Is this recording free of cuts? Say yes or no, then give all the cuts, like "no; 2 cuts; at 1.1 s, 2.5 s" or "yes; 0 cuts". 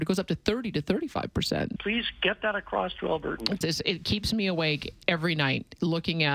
no; 3 cuts; at 1.8 s, 3.6 s, 5.0 s